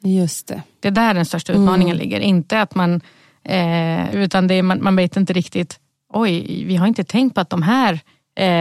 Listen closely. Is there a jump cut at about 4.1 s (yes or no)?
yes